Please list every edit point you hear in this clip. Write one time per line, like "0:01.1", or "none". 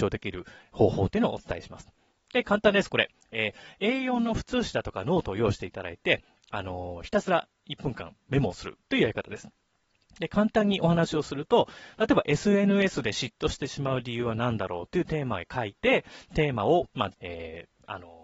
0:17.1